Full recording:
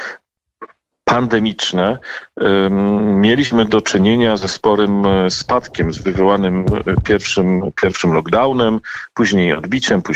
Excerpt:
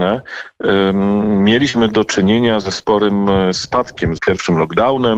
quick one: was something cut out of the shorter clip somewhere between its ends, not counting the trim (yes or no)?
yes